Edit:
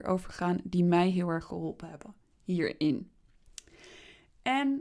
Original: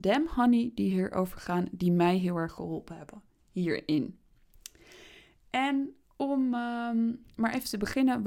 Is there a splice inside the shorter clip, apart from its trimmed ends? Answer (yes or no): no